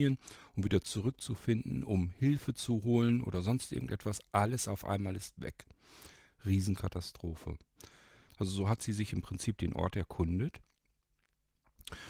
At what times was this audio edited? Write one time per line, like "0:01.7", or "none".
0:08.3

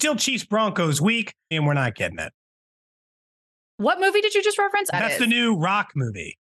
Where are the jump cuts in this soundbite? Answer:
0:01.5
0:04.9

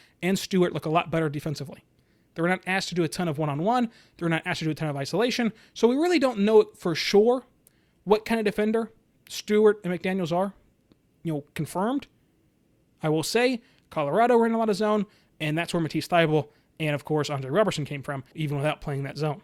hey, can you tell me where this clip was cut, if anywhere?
0:18.3

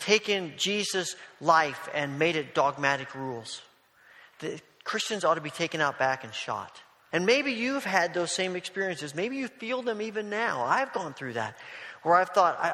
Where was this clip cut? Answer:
0:07.1

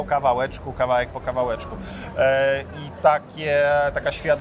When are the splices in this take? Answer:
none

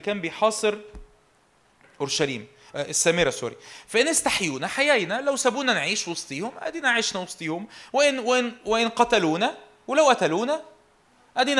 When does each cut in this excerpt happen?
none

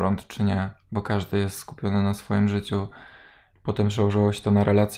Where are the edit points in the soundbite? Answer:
0:03.5

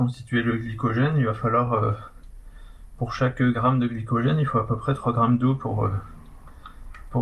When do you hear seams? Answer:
none

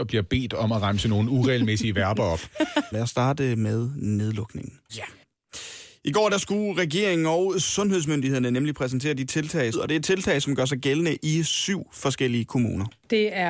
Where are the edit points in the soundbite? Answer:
0:02.9
0:04.9
0:09.7

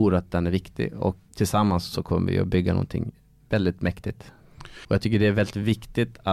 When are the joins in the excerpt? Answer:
0:01.3
0:04.8

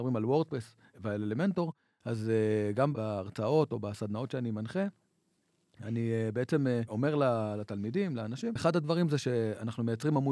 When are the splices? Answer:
0:08.6

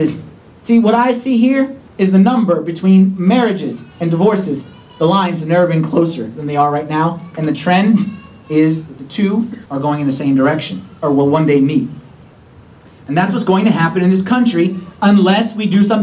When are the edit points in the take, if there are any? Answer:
0:09.7

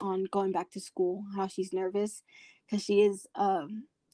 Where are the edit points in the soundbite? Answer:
none

